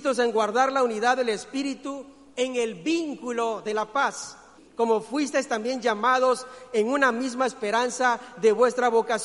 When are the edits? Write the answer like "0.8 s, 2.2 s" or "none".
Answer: 4.6 s